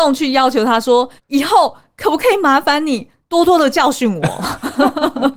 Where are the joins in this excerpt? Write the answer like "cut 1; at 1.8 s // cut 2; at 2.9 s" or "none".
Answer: cut 1; at 1.2 s